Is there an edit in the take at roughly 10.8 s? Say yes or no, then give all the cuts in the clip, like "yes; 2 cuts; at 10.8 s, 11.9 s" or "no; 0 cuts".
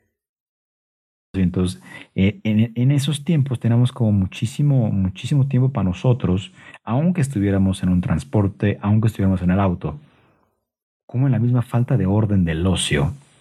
yes; 2 cuts; at 1.3 s, 10.8 s